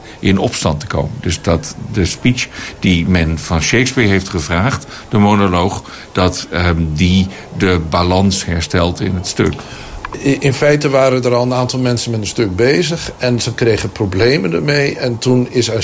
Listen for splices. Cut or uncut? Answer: uncut